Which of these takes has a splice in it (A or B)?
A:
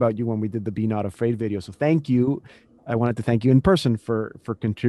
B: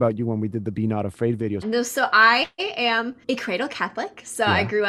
B